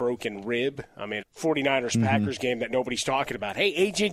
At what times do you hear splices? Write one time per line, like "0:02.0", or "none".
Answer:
0:01.2